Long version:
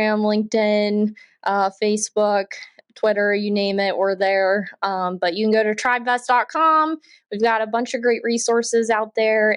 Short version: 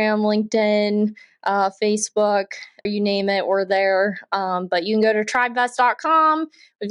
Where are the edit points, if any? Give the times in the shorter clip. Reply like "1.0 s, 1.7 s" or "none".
2.9 s